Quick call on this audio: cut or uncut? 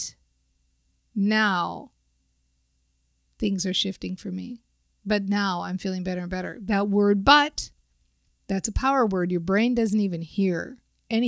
uncut